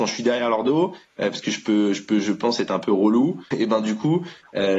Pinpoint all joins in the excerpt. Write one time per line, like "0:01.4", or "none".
0:03.5